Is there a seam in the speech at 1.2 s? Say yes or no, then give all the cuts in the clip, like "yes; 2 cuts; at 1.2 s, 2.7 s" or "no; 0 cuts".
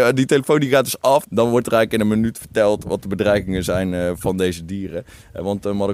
yes; 1 cut; at 1.2 s